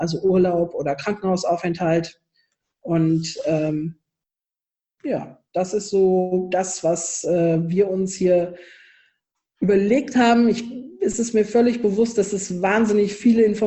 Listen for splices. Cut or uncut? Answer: uncut